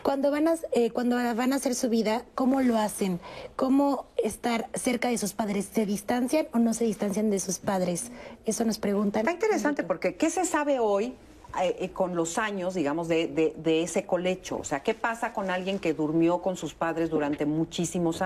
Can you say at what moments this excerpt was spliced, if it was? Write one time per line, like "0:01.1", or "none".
none